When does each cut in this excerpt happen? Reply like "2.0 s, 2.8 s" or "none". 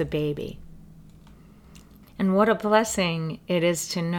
2.0 s